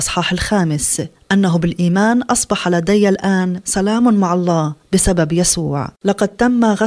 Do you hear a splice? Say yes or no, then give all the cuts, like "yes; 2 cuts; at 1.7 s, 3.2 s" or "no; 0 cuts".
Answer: yes; 1 cut; at 6.0 s